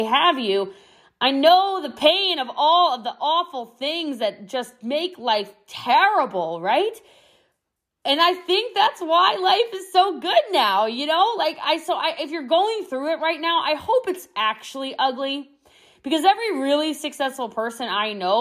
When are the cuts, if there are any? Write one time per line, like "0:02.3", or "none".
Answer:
none